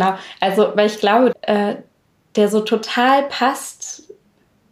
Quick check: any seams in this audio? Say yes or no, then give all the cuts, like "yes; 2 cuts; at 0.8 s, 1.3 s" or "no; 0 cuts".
yes; 1 cut; at 1.3 s